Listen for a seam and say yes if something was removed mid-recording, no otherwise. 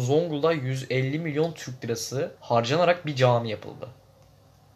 yes